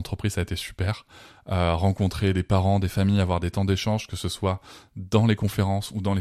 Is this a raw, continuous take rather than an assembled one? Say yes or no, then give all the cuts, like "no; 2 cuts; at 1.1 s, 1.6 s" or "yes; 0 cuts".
yes; 0 cuts